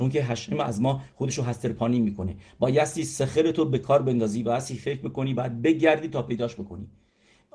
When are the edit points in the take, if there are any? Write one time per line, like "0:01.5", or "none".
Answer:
none